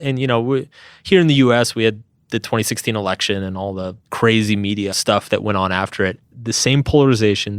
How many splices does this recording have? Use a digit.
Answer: 1